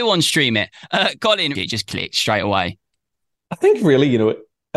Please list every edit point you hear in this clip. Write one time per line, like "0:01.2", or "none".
0:01.6